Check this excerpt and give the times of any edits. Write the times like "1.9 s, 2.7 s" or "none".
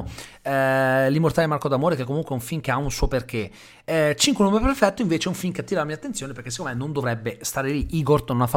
none